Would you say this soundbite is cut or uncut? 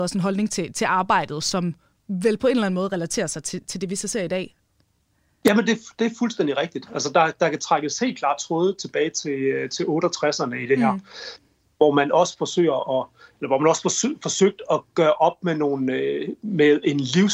uncut